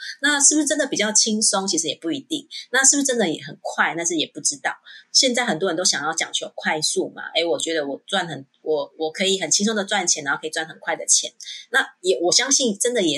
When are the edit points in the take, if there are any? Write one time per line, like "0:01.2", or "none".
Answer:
0:05.0